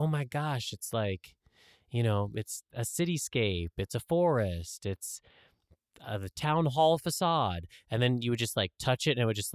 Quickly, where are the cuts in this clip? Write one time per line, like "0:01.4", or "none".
none